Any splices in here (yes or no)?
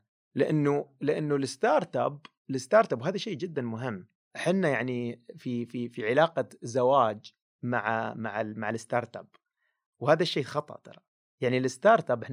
no